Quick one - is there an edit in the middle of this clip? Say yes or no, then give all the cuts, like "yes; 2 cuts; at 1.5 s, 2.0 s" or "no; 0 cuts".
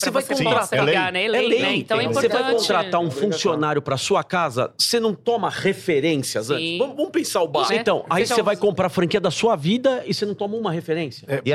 yes; 1 cut; at 7.7 s